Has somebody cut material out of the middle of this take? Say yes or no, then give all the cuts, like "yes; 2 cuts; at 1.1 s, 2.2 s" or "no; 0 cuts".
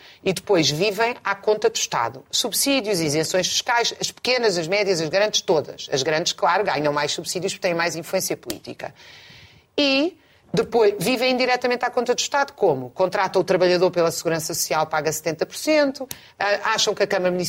no; 0 cuts